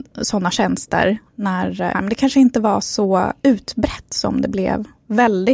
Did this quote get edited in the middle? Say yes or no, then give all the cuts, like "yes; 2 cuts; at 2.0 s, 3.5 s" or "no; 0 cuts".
yes; 1 cut; at 1.9 s